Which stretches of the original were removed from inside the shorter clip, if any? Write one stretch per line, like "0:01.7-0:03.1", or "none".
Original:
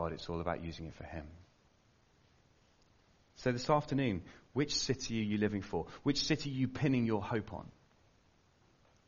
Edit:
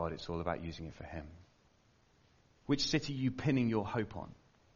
0:02.7-0:06.0